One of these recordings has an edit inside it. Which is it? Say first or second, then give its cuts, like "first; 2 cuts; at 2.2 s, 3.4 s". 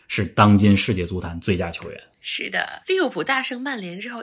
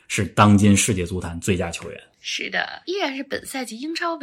second; 1 cut; at 2.8 s